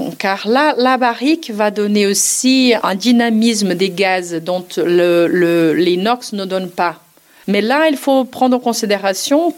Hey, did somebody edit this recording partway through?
yes; 1 cut; at 7.4 s

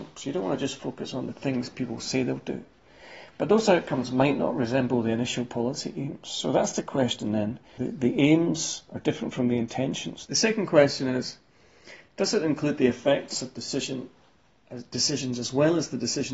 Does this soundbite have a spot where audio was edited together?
yes; 2 cuts; at 7.8 s, 10.3 s

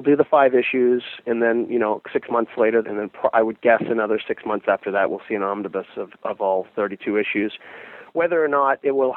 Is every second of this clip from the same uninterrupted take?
no; 1 cut; at 2.8 s

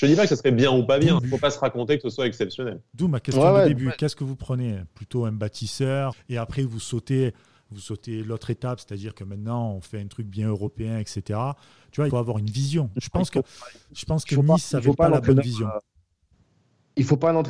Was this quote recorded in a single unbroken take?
no; 3 cuts; at 1.2 s, 6.1 s, 12.1 s

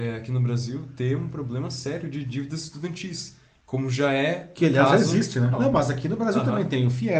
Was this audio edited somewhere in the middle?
yes; 1 cut; at 5.5 s

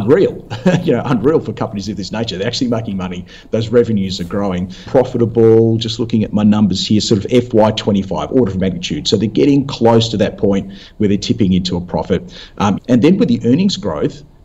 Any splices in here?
yes; 2 cuts; at 4.9 s, 12.8 s

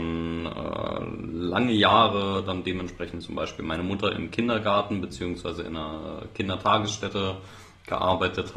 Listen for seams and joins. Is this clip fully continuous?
yes; 0 cuts

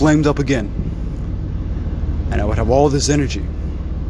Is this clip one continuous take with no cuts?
yes; 0 cuts

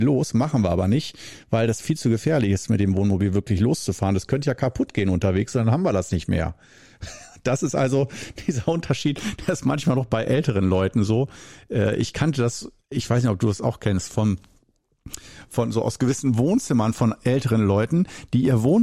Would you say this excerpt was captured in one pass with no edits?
yes; 0 cuts

